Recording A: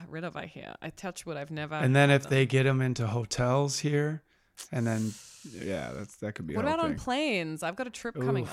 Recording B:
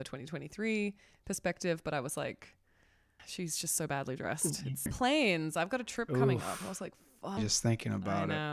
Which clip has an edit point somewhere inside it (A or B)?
B